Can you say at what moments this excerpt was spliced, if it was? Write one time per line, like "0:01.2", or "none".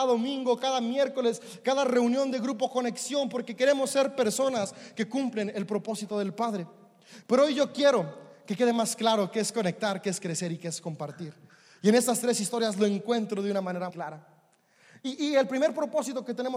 0:13.9